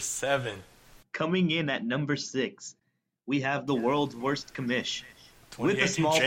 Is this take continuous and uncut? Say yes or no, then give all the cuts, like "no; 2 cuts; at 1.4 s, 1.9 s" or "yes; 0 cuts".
no; 1 cut; at 1.0 s